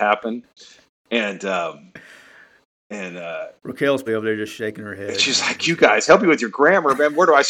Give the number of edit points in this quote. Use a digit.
1